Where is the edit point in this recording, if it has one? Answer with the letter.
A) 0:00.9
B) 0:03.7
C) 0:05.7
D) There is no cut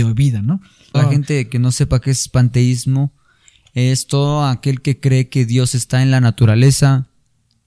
A